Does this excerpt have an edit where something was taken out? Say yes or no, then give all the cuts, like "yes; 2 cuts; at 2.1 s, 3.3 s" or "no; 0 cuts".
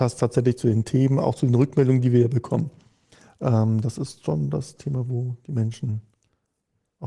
no; 0 cuts